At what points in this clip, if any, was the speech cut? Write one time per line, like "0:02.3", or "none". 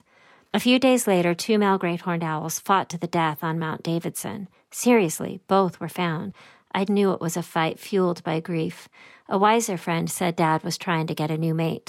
0:06.9